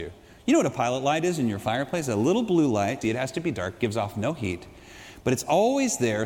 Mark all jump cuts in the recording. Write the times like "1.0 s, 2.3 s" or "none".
3.0 s